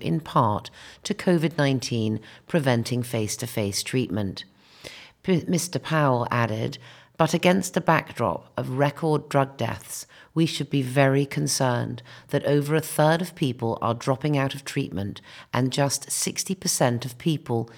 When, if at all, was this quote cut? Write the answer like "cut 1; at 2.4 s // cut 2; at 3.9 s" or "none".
none